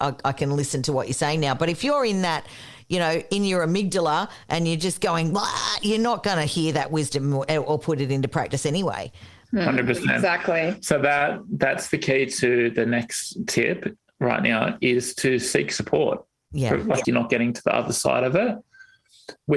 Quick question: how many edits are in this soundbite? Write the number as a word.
one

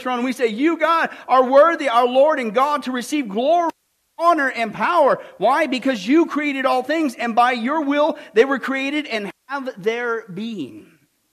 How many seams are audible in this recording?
zero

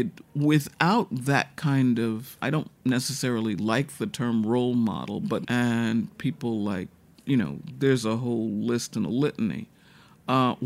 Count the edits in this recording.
one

